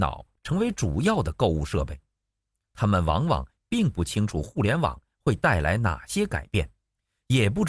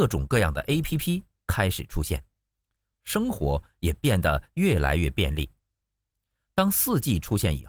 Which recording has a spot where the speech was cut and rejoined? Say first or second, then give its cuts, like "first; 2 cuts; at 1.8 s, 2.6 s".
first; 1 cut; at 2.6 s